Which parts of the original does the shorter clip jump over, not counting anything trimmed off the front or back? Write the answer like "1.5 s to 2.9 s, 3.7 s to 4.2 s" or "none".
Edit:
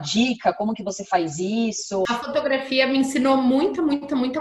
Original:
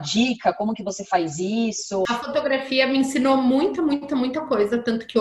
none